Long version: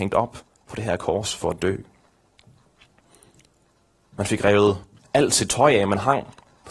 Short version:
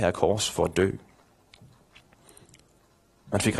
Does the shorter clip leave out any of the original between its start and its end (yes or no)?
no